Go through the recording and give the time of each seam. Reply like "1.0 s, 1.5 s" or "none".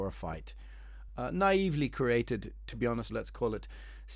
1.1 s, 3.1 s